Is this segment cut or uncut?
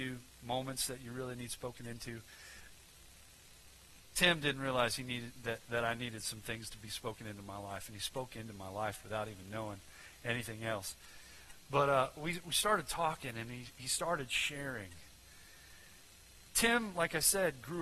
uncut